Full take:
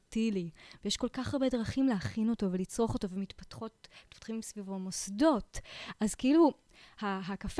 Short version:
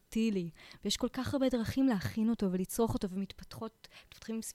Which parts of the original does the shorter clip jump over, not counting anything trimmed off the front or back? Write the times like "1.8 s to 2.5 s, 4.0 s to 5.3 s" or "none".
none